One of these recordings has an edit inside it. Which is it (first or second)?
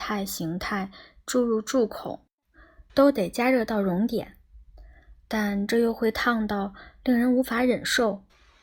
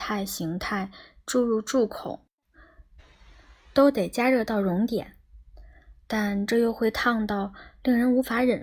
first